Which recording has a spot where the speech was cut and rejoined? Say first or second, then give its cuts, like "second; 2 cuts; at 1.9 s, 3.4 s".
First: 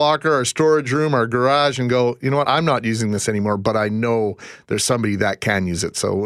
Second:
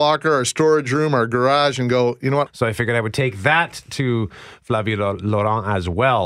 second; 1 cut; at 2.5 s